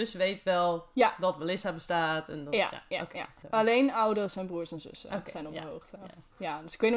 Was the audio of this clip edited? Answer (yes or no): yes